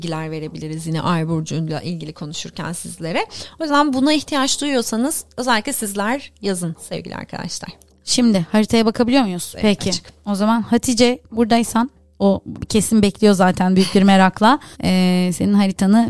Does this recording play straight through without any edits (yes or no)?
no